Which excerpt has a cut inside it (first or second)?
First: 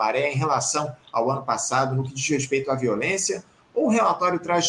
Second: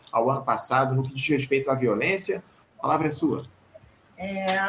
second